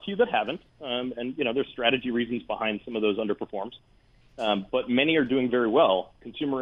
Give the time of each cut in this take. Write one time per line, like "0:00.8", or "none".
none